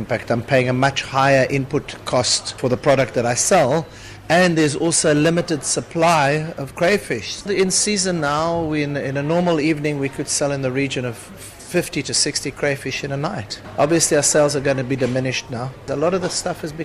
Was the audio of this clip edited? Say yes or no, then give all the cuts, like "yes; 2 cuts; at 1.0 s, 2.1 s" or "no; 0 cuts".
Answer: no; 0 cuts